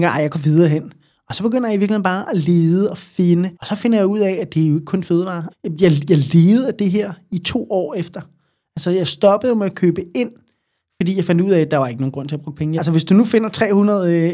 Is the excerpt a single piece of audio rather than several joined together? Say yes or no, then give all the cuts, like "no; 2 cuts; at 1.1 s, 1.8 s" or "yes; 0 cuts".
no; 3 cuts; at 3.5 s, 5.5 s, 12.8 s